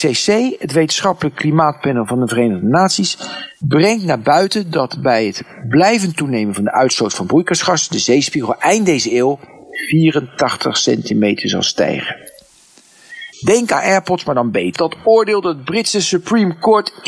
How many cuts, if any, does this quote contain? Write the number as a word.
two